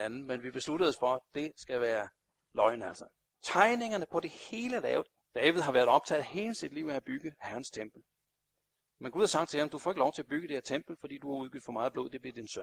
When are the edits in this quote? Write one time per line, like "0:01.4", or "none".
0:03.2
0:05.2

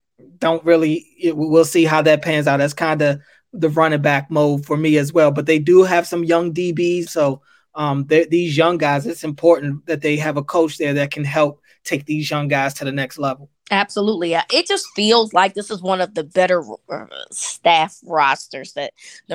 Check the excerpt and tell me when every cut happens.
0:07.1

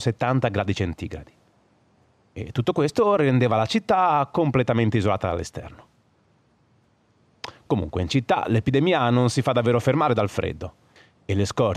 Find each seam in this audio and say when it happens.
none

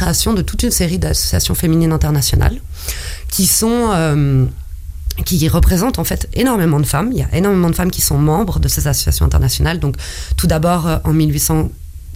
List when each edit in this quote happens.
none

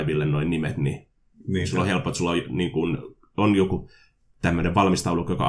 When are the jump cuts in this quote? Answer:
none

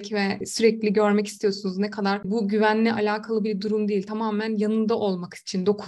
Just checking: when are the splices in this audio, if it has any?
none

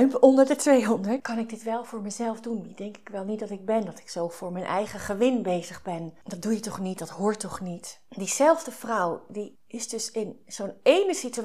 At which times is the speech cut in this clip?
0:01.2
0:09.6

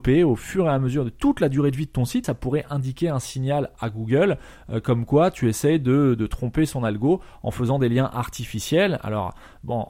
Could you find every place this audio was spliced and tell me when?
0:02.2

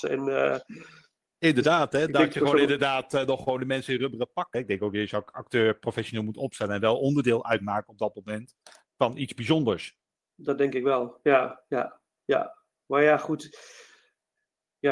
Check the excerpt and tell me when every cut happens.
0:04.5

